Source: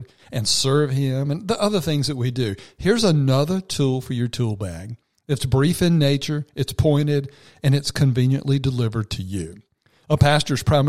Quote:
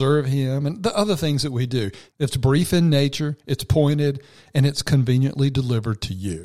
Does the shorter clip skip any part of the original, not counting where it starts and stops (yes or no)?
yes